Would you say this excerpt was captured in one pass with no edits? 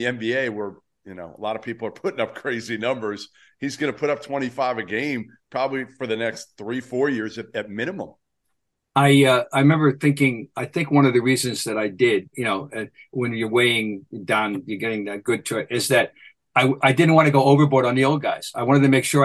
no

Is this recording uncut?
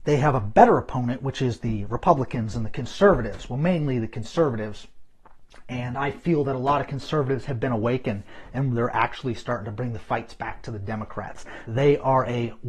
no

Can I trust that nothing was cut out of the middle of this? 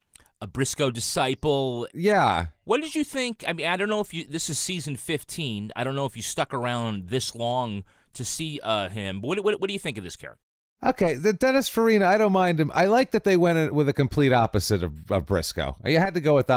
yes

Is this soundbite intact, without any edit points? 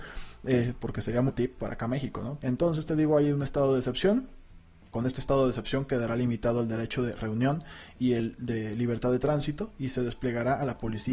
no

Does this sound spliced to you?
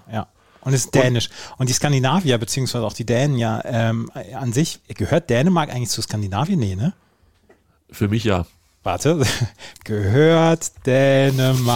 no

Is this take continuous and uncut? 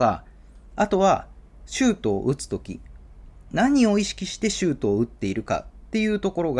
yes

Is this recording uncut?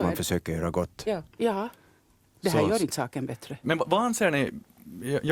no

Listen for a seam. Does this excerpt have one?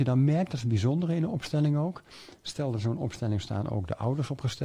no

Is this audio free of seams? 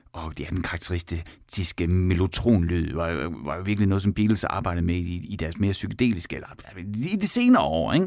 yes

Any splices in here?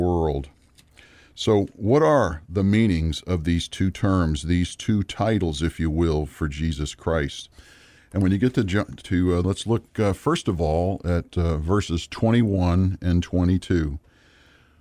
yes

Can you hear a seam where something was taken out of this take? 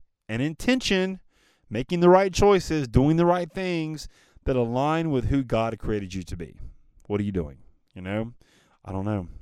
no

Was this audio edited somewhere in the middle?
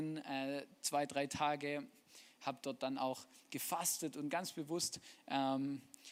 no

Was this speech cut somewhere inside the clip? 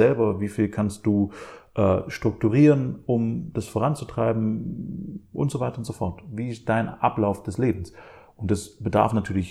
no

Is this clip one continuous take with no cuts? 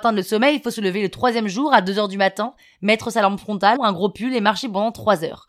no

